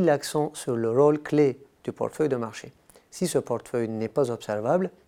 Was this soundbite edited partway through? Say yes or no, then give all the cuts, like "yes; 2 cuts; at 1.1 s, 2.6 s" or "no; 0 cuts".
no; 0 cuts